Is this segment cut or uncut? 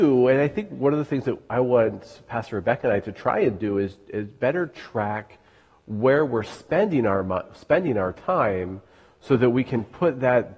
uncut